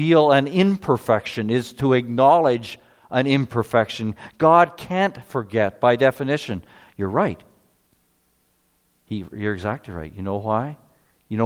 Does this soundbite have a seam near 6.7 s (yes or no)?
no